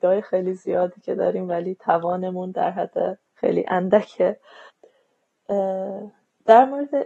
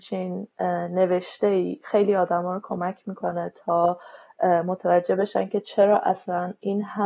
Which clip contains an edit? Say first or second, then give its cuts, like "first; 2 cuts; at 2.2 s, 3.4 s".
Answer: first; 1 cut; at 3.3 s